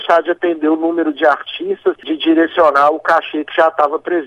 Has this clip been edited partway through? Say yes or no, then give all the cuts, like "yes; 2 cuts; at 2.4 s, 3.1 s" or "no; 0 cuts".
yes; 1 cut; at 2.0 s